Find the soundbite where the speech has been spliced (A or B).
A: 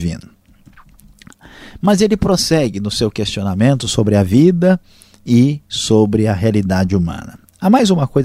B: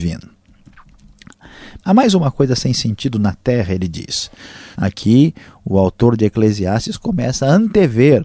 B